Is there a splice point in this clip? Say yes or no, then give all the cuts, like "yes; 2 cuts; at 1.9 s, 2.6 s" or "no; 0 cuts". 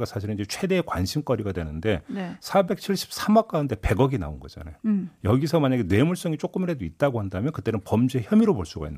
no; 0 cuts